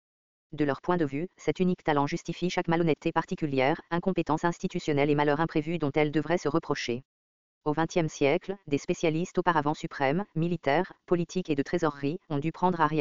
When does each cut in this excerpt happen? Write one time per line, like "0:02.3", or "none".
none

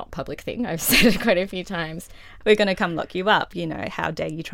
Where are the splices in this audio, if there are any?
0:02.4

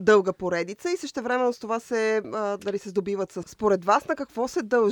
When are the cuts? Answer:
0:03.4

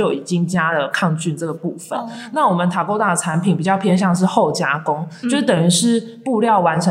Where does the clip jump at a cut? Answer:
none

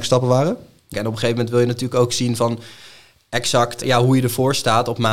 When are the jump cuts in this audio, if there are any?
0:00.9
0:03.8

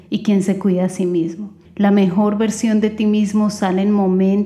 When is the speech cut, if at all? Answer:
0:01.7

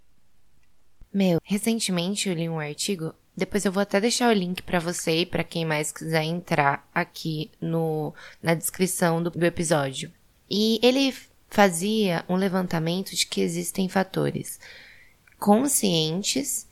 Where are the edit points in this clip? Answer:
0:01.4

